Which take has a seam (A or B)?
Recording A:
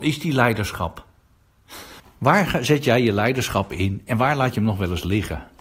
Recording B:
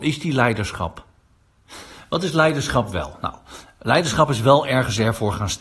A